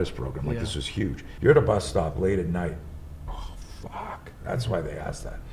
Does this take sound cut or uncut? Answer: cut